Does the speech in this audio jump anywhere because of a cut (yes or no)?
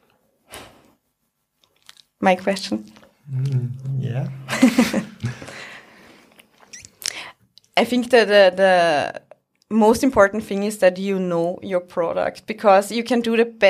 no